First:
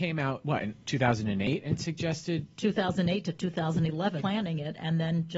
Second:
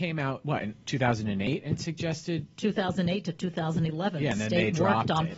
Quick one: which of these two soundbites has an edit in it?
first; 1 cut; at 4.2 s

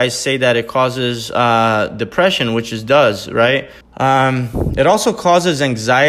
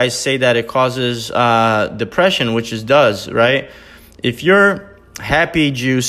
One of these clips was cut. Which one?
first; 1 cut; at 3.8 s

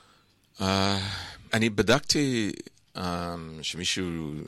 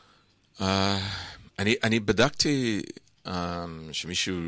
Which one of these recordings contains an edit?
first; 1 cut; at 1.5 s

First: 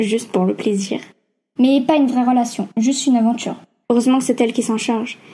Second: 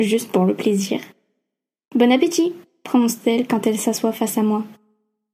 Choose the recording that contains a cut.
first; 2 cuts; at 1.6 s, 3.8 s

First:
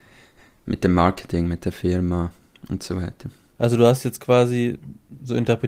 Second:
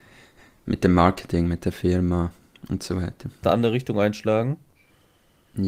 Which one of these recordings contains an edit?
second; 1 cut; at 3.4 s

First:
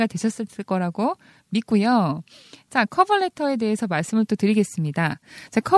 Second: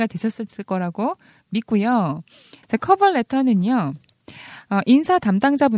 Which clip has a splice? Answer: second; 1 cut; at 2.6 s

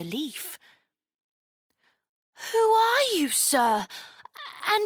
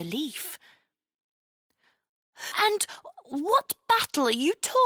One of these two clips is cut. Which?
second; 1 cut; at 2.5 s

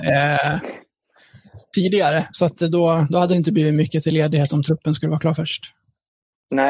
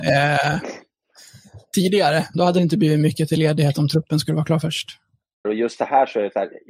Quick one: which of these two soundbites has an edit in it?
second; 2 cuts; at 2.3 s, 5.4 s

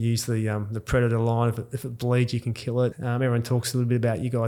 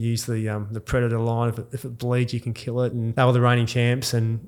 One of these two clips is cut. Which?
first; 1 cut; at 2.9 s

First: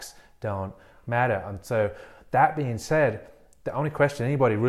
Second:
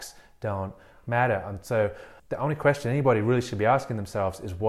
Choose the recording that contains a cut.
second; 1 cut; at 2.2 s

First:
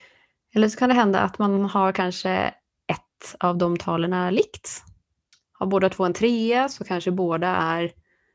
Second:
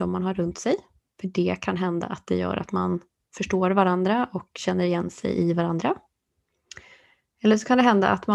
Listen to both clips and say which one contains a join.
first; 1 cut; at 5.3 s

